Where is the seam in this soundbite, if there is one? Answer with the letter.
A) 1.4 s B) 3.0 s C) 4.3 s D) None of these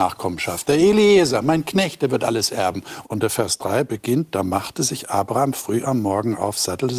B